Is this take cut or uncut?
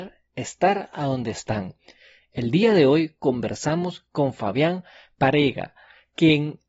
uncut